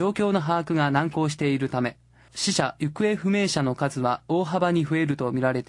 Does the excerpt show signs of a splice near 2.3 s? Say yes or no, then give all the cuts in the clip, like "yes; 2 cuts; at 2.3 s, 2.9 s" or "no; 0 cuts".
yes; 1 cut; at 2.3 s